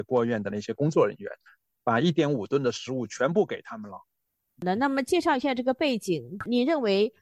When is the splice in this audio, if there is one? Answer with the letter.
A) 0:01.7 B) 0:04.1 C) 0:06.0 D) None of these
D